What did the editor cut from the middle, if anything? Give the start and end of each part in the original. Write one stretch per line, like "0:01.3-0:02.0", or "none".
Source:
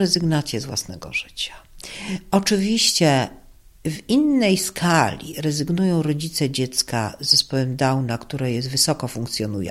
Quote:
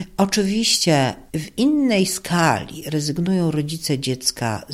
0:03.4-0:03.8